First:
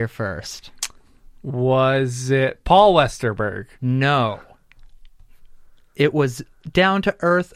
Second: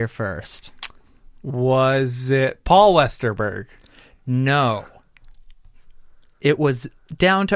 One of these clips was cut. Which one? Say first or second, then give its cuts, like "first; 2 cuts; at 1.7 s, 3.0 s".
first; 1 cut; at 3.7 s